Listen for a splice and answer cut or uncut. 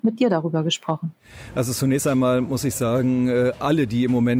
uncut